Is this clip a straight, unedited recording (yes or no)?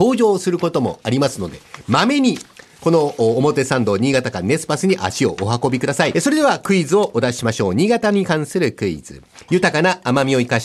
no